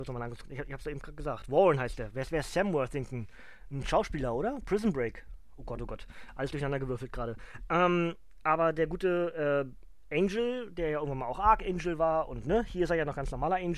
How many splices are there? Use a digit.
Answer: 0